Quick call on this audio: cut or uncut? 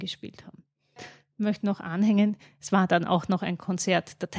cut